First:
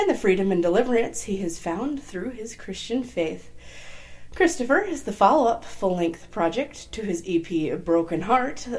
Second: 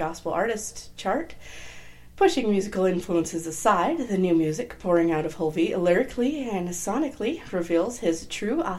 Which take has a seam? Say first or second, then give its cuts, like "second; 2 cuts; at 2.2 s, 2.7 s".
second; 1 cut; at 2.1 s